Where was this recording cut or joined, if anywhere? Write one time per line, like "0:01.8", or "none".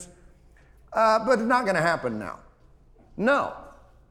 0:03.0

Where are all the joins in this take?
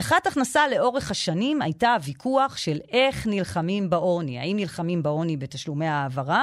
none

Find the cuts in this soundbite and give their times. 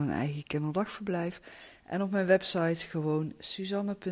0:01.8

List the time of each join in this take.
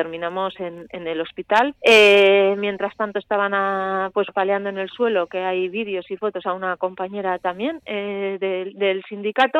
0:01.8
0:04.3

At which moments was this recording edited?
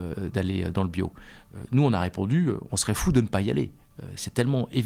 none

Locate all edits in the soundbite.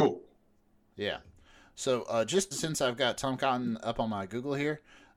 0:02.5

